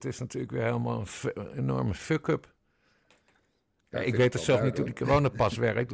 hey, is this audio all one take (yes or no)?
yes